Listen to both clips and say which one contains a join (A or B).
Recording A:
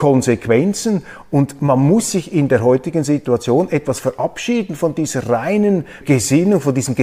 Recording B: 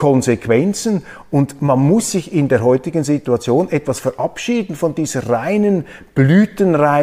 A